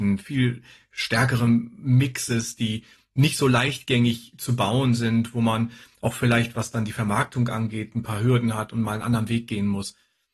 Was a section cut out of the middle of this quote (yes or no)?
no